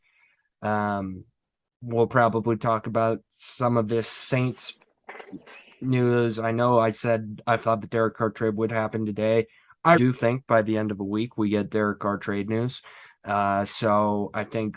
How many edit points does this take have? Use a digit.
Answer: 1